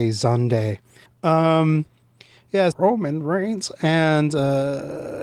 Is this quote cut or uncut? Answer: cut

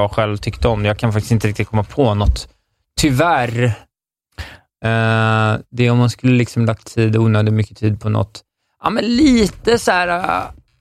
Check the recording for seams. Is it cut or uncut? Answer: uncut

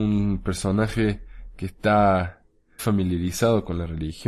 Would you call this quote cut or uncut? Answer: cut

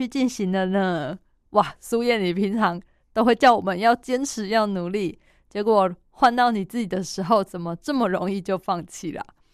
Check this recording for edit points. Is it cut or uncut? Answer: cut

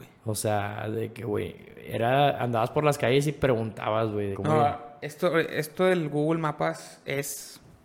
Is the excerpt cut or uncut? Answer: cut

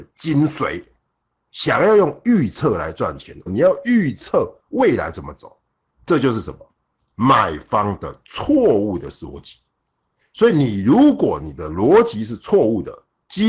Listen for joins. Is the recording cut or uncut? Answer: cut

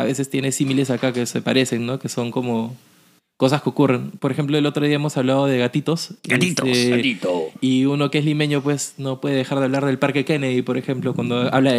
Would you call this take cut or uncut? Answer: uncut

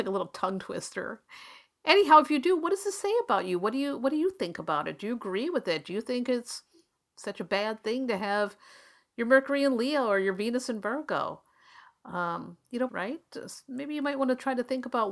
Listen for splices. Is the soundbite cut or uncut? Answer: cut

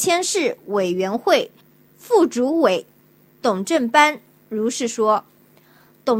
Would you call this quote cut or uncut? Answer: uncut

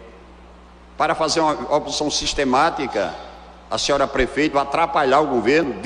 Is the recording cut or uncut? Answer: cut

